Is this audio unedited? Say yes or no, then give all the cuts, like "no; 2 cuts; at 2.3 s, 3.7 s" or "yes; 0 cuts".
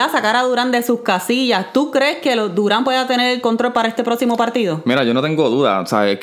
yes; 0 cuts